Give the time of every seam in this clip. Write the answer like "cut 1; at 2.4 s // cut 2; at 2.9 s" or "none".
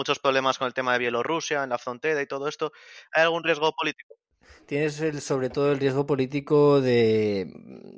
none